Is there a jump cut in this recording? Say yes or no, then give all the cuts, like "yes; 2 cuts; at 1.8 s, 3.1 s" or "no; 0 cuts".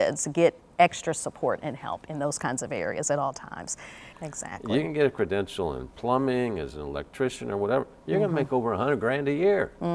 yes; 1 cut; at 4.1 s